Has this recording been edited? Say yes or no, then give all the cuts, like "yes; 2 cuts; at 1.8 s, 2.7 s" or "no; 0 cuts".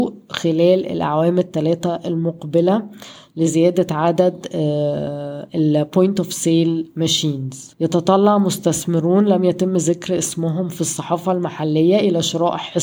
yes; 1 cut; at 7.7 s